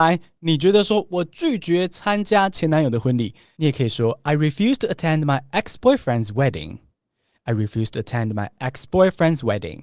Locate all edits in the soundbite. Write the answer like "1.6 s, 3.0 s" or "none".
none